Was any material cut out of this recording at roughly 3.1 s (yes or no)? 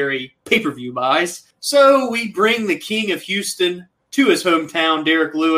no